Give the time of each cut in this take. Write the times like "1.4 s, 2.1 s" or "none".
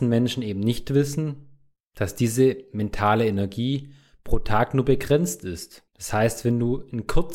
5.9 s